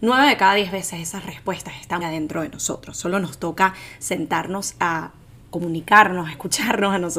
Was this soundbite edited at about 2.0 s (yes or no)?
yes